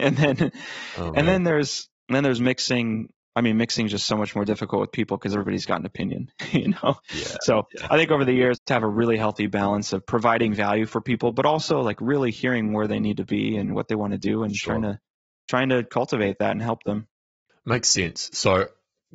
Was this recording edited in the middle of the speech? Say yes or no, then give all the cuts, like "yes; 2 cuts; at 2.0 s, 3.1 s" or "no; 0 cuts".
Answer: yes; 1 cut; at 8.5 s